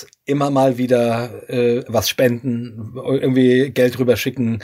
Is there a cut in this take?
no; 0 cuts

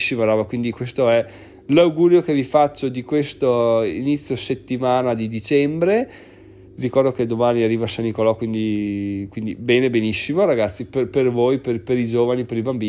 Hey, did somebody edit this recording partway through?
no; 0 cuts

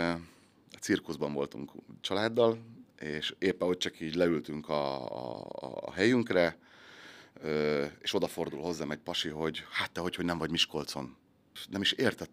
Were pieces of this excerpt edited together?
no; 0 cuts

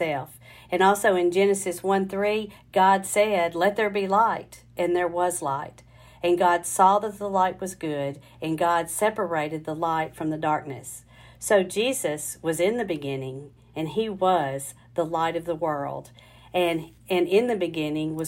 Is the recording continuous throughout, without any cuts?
yes; 0 cuts

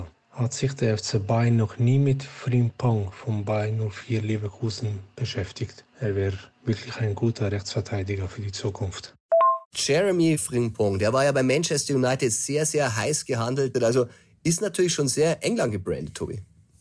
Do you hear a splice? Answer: yes; 1 cut; at 13.7 s

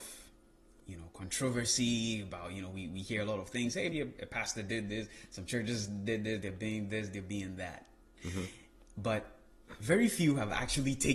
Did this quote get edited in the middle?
yes; 2 cuts; at 3.9 s, 6.4 s

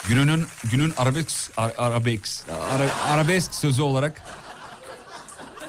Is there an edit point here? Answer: no; 0 cuts

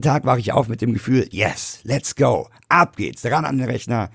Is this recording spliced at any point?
no; 0 cuts

